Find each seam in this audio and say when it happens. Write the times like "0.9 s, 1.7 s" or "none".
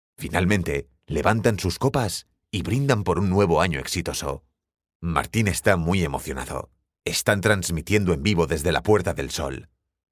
7.0 s